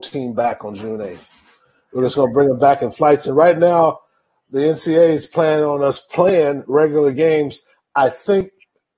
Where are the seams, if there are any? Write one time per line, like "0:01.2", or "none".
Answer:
none